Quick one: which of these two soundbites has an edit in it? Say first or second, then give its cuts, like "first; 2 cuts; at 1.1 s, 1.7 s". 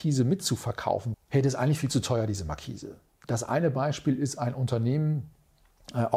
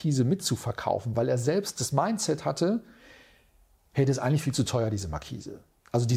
first; 2 cuts; at 1.1 s, 3.2 s